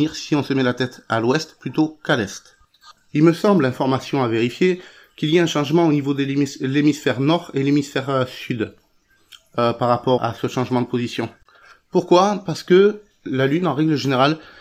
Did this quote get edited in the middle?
yes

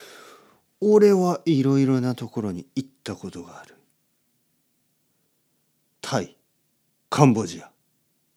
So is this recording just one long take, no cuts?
no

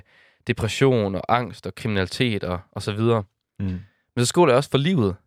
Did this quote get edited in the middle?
no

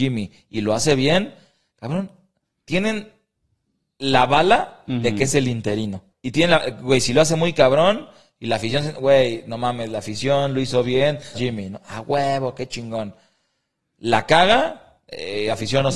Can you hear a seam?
yes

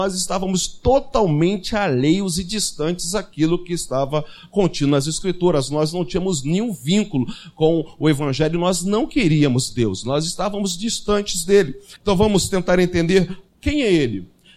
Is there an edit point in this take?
yes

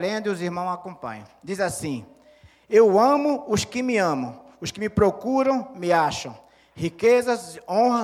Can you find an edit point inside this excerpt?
no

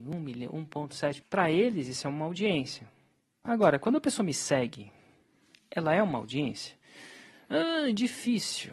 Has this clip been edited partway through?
yes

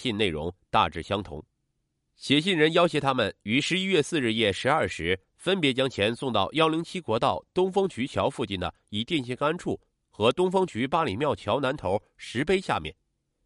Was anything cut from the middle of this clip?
no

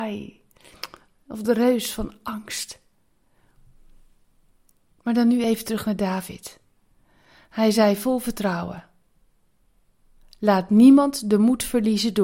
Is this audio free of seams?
yes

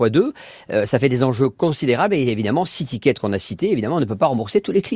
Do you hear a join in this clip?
no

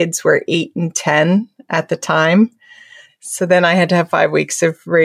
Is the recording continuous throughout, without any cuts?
no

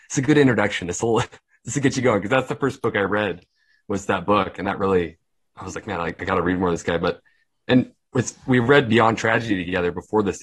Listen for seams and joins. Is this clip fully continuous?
yes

